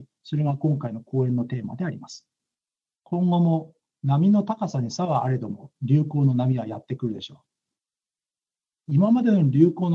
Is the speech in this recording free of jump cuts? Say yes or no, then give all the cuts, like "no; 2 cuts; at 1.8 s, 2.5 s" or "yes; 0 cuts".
no; 1 cut; at 2.9 s